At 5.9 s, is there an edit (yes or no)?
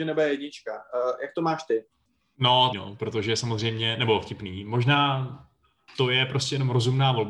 no